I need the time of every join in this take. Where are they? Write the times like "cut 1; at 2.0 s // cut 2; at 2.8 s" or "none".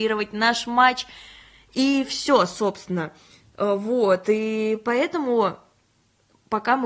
none